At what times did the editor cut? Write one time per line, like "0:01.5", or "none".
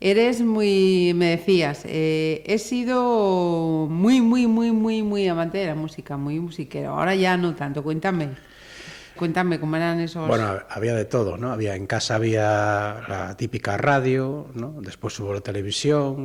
0:09.2